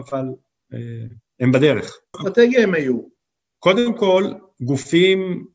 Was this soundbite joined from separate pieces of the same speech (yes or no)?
yes